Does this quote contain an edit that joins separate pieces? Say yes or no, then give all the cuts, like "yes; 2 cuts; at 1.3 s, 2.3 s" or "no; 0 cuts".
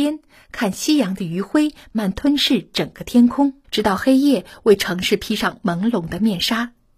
yes; 2 cuts; at 1.9 s, 3.6 s